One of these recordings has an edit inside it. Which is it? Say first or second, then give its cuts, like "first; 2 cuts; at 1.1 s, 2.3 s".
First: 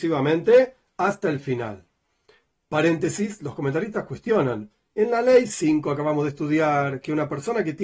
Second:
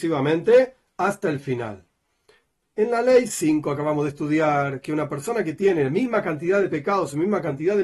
second; 1 cut; at 2.6 s